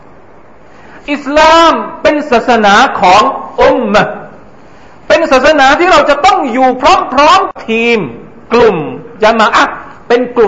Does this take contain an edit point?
no; 0 cuts

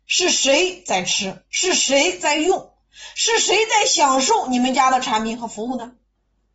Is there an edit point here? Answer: no; 0 cuts

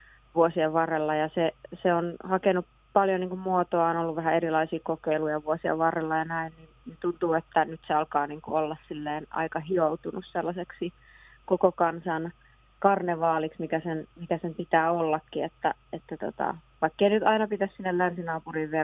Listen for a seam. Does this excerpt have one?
no; 0 cuts

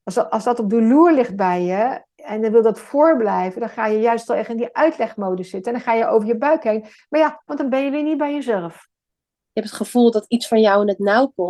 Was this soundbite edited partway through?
yes; 2 cuts; at 7.5 s, 9.4 s

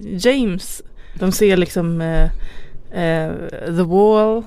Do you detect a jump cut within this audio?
yes; 1 cut; at 1.2 s

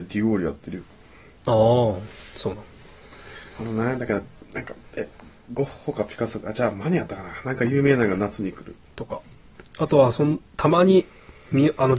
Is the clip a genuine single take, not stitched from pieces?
no; 2 cuts; at 8.9 s, 10.5 s

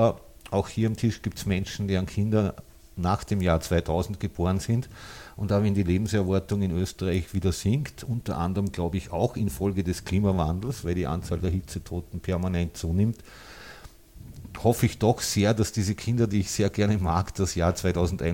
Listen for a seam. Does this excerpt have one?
no; 0 cuts

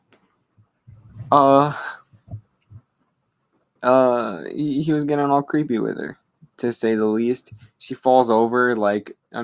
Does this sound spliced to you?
yes; 1 cut; at 3.8 s

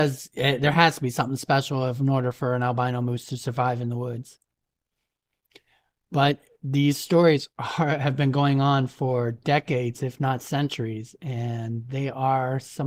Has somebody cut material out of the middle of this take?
no; 0 cuts

